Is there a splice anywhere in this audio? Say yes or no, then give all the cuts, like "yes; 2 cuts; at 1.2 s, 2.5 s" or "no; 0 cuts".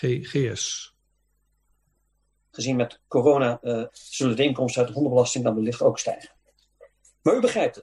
yes; 2 cuts; at 2.5 s, 3.9 s